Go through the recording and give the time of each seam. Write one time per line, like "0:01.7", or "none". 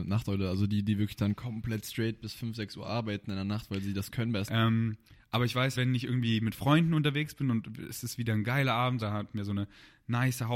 0:04.5
0:05.7
0:09.0